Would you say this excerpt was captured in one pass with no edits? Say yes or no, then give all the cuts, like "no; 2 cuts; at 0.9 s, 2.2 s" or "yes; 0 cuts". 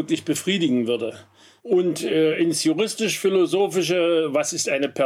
no; 1 cut; at 1.6 s